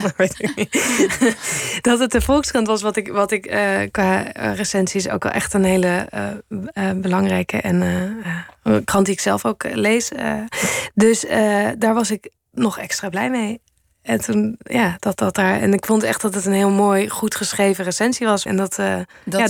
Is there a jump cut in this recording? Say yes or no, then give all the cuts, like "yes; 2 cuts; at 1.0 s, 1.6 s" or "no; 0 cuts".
yes; 2 cuts; at 15.1 s, 18.5 s